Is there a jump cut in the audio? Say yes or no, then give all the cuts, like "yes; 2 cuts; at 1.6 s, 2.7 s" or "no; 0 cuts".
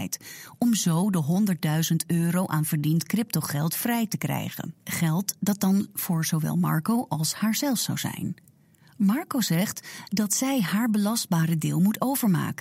yes; 1 cut; at 4.8 s